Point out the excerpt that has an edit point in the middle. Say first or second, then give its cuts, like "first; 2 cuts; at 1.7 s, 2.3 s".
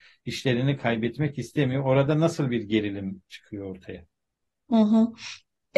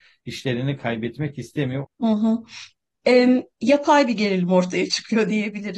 second; 1 cut; at 1.8 s